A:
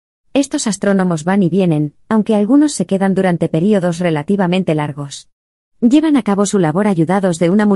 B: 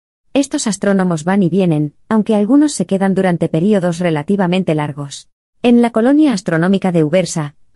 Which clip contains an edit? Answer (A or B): B